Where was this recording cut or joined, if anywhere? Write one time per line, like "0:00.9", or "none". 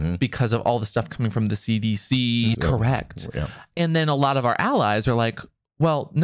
0:02.5